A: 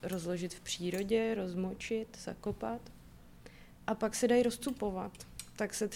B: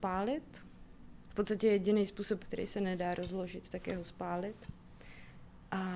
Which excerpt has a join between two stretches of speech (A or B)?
B